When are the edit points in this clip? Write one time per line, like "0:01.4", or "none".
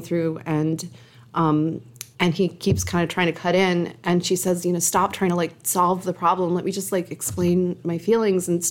0:02.1